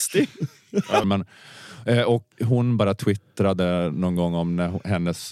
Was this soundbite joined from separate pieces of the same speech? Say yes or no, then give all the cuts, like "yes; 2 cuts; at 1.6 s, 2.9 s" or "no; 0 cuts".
yes; 2 cuts; at 1.0 s, 2.3 s